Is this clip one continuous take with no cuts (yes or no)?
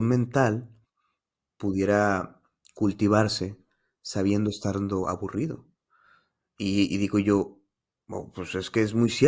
yes